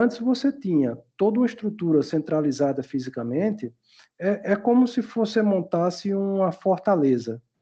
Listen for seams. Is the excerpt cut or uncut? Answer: uncut